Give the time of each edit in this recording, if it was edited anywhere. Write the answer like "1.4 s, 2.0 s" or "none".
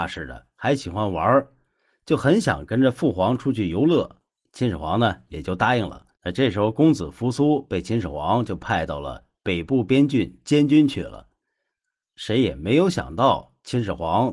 6.1 s

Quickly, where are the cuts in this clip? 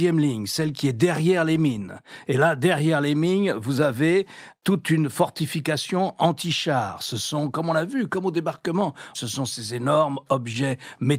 9.1 s

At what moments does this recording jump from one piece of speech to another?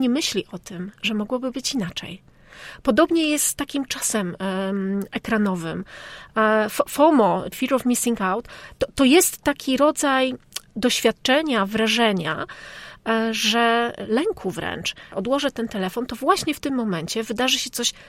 7.5 s, 15.1 s

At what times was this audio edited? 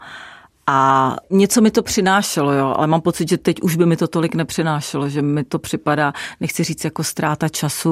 none

